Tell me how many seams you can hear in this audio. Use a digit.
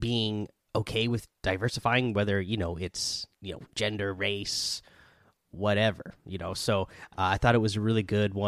2